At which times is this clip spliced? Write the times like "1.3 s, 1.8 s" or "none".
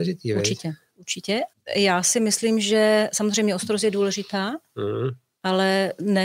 1.5 s